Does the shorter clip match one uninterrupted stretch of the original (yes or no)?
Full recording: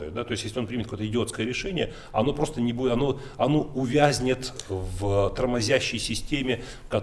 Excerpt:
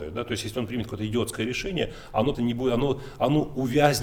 no